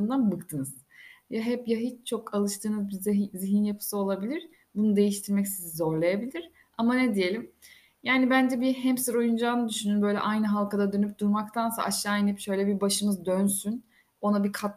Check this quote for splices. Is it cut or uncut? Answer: uncut